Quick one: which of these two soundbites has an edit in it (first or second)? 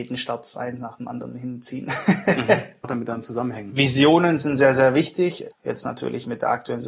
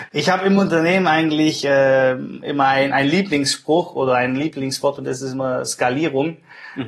first